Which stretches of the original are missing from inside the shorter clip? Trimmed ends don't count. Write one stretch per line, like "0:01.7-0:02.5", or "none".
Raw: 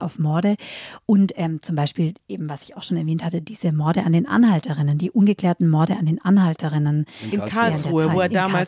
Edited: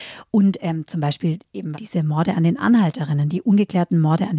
0:02.5-0:03.4